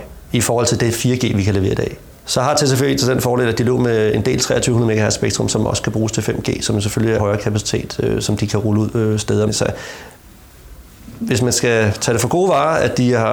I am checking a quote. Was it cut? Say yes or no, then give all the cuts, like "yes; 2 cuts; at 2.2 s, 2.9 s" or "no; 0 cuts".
yes; 2 cuts; at 7.2 s, 9.5 s